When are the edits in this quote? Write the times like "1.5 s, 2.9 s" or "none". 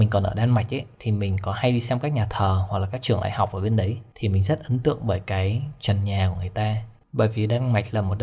7.0 s